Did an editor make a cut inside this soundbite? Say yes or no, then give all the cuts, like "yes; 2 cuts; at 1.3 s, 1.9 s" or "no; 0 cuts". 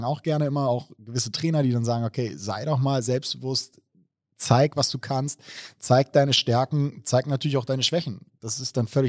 no; 0 cuts